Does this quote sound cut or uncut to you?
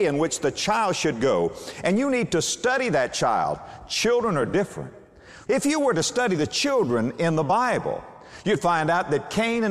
cut